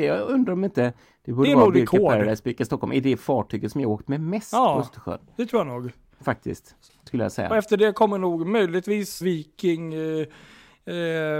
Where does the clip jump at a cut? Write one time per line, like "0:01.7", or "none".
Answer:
0:09.2